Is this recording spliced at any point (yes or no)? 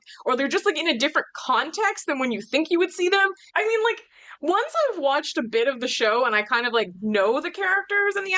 yes